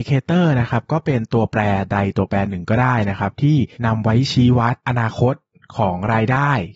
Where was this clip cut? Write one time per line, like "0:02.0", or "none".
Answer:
0:03.7
0:04.8